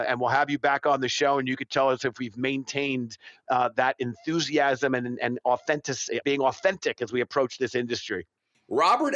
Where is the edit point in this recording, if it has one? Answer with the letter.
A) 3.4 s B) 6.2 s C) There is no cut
B